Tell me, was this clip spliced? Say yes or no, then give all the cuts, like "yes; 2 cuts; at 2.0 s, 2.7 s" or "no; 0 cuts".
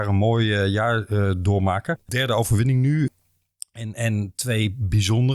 no; 0 cuts